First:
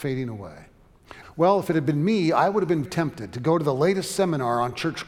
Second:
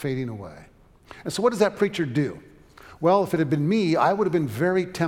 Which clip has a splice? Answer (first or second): first